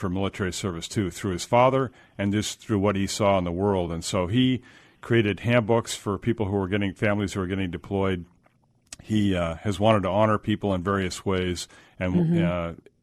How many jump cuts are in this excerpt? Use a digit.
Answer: 0